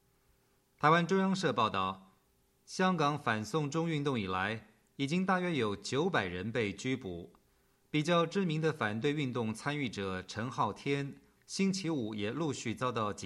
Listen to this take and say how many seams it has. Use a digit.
1